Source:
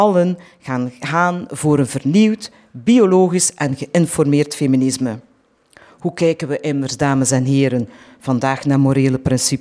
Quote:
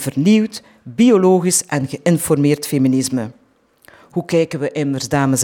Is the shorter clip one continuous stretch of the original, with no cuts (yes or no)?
yes